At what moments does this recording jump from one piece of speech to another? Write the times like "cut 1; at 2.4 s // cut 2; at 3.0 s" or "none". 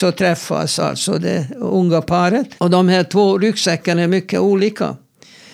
cut 1; at 2.6 s